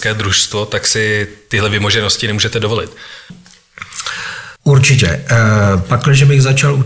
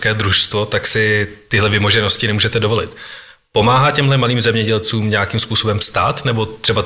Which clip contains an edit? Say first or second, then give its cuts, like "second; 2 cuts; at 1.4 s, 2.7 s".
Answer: first; 2 cuts; at 3.3 s, 4.6 s